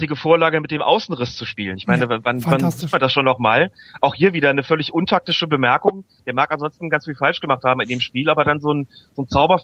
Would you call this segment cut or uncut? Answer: uncut